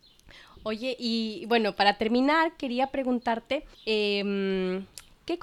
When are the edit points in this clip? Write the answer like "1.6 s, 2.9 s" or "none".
3.7 s